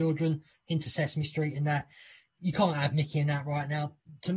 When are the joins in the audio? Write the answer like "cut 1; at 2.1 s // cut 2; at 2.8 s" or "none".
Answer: none